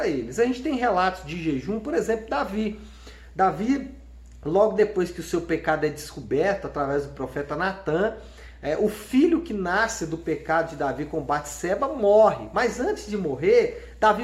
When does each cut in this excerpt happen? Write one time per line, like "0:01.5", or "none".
none